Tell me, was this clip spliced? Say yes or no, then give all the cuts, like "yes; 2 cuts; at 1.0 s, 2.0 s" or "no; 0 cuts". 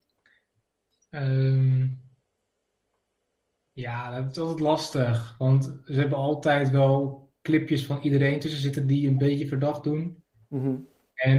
no; 0 cuts